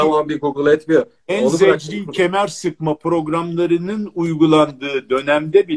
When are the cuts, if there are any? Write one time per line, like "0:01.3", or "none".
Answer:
none